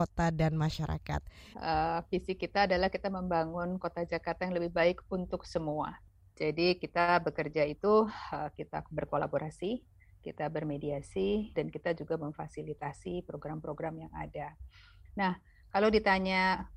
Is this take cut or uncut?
cut